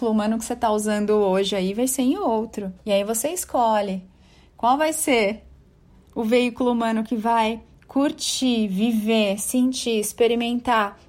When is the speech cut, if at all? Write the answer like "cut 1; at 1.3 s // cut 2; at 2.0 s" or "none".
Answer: cut 1; at 2.8 s